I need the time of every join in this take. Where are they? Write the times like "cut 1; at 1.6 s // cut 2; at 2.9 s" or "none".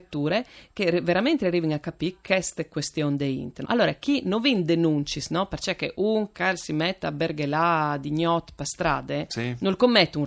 cut 1; at 3.6 s